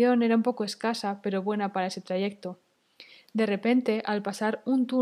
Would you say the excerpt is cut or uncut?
uncut